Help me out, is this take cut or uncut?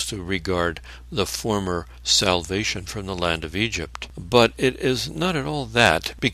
uncut